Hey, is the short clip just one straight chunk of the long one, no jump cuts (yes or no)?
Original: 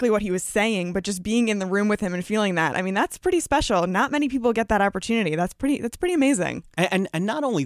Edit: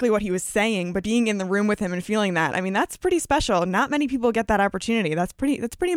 no